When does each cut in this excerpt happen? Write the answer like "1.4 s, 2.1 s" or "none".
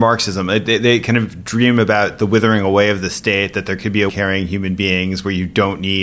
4.1 s

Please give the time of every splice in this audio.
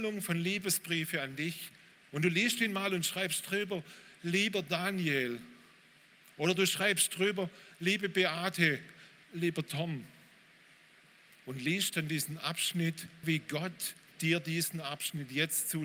2.1 s, 9.2 s, 13.2 s

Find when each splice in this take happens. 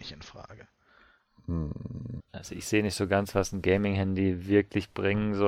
2.2 s

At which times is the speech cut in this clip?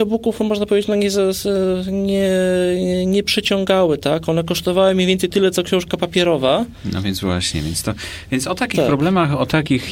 none

